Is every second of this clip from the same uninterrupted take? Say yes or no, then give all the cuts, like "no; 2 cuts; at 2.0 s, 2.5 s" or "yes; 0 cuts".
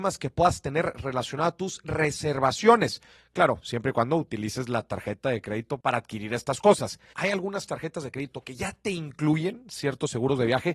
no; 1 cut; at 7.1 s